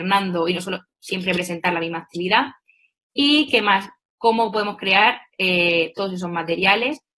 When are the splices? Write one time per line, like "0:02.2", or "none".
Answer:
0:04.1